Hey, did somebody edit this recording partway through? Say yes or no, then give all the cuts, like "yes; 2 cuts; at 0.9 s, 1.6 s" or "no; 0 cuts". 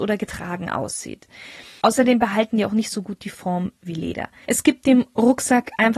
yes; 2 cuts; at 1.8 s, 4.5 s